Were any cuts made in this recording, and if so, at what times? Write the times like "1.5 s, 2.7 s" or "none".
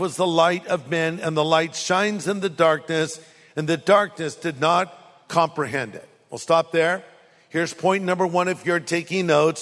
none

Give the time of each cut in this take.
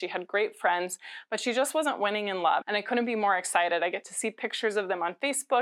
2.6 s

